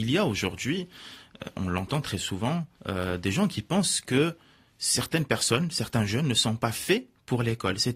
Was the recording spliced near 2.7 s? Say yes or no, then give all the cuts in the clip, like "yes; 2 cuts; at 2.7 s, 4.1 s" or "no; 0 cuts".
yes; 1 cut; at 2.7 s